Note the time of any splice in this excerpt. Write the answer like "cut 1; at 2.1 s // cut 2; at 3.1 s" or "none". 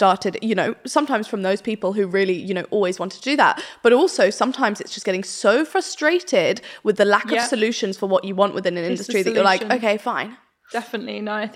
none